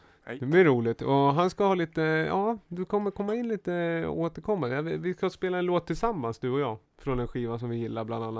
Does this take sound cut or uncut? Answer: uncut